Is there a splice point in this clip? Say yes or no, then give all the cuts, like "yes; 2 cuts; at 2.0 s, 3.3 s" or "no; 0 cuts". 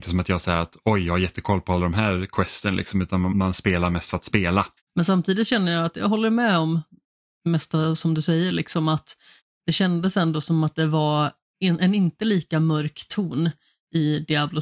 yes; 2 cuts; at 3.3 s, 4.8 s